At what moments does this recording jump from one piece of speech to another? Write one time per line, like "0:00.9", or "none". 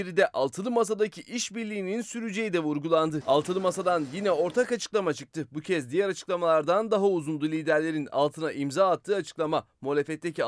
0:03.2